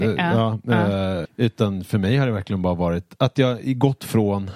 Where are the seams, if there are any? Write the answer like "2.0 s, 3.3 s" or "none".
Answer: 1.2 s